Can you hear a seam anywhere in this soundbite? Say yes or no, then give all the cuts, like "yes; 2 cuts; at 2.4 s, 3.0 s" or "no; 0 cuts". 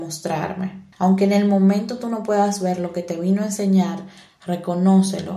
yes; 2 cuts; at 0.9 s, 4.3 s